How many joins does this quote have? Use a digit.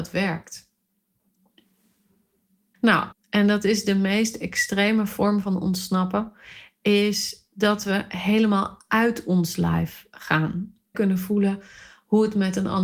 2